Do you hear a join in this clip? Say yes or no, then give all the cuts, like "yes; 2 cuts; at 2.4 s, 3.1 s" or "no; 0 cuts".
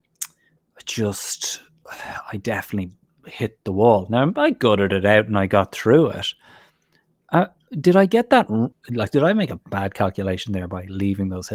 yes; 1 cut; at 8.7 s